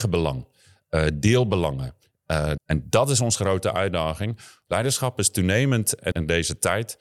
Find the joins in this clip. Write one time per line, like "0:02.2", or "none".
0:02.6
0:04.7
0:06.1